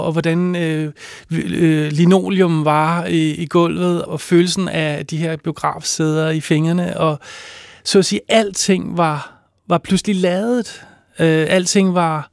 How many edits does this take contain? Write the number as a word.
one